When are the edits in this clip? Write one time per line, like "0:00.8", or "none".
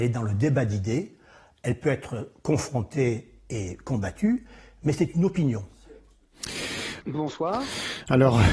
0:07.0